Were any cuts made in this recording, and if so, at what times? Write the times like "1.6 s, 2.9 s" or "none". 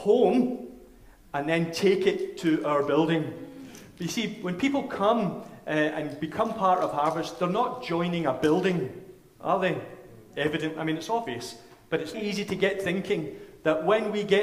12.1 s